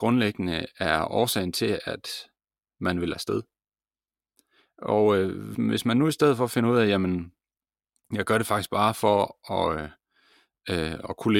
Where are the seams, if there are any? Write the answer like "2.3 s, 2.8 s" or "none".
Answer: 5.5 s

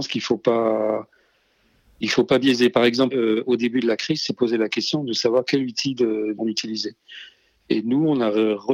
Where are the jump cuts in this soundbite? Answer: 3.1 s, 6.4 s

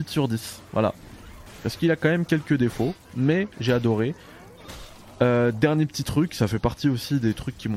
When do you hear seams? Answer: none

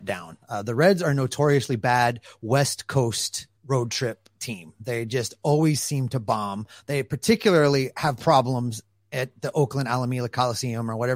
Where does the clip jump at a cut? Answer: 3.6 s

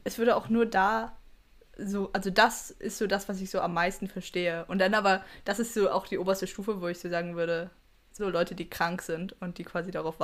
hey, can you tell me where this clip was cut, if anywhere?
8.2 s

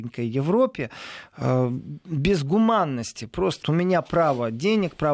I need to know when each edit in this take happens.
3.6 s

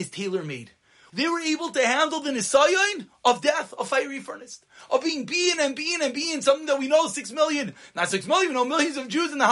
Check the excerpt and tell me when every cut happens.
1.1 s

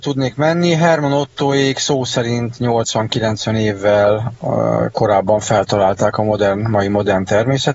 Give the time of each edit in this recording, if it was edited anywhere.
none

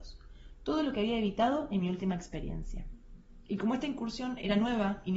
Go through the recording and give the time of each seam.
none

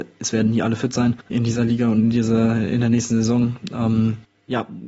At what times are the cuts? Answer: 1.3 s

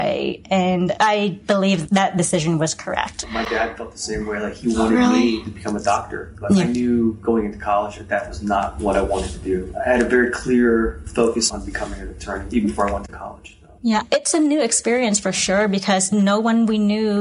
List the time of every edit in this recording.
none

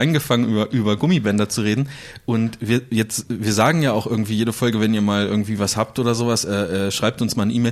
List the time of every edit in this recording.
none

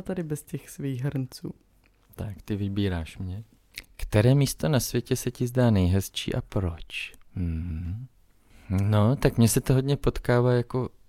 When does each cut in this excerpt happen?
none

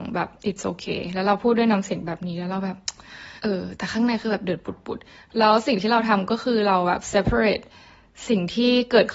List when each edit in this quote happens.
3.4 s

